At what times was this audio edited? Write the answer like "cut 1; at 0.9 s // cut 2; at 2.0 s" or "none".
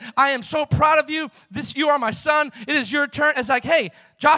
cut 1; at 3.3 s